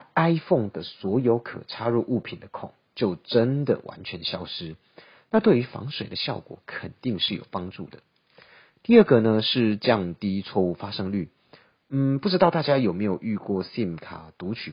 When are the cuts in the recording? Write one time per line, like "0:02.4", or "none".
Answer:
none